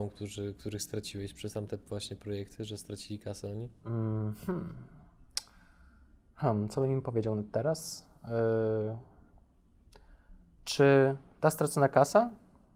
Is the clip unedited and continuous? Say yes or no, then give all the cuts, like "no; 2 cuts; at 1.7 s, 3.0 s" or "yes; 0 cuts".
yes; 0 cuts